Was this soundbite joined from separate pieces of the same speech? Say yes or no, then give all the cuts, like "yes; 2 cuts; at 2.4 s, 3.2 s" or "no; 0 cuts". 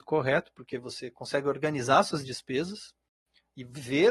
no; 0 cuts